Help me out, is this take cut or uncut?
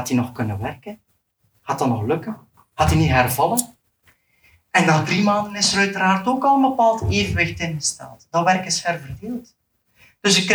uncut